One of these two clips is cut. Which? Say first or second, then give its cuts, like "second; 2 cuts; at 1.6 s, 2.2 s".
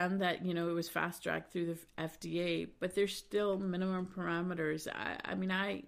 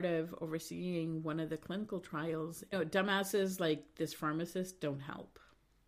second; 1 cut; at 2.7 s